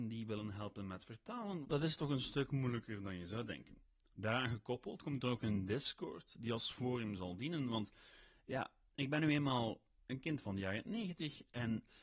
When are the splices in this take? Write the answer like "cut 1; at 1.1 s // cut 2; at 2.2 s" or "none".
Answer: cut 1; at 1.6 s // cut 2; at 4.0 s